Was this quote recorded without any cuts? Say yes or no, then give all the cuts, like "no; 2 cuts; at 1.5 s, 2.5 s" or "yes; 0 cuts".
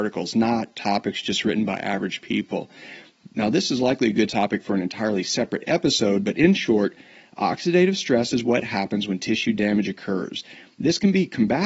yes; 0 cuts